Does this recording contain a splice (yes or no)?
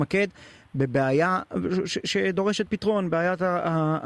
no